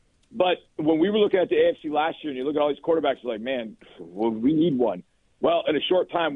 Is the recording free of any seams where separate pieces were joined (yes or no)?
yes